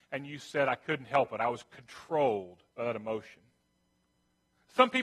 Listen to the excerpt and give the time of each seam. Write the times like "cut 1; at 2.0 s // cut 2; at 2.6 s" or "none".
cut 1; at 1.4 s // cut 2; at 2.7 s